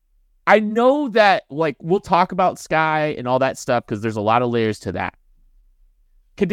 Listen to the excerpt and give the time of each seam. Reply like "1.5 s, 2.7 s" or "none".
1.5 s